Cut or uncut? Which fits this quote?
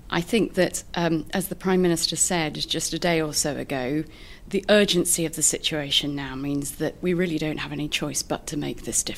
uncut